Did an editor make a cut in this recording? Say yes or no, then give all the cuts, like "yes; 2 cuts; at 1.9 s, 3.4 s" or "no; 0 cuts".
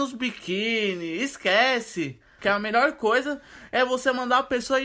yes; 1 cut; at 2.4 s